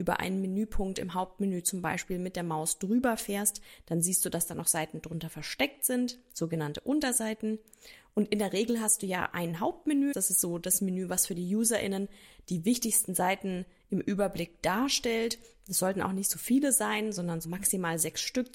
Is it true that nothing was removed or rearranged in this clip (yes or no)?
no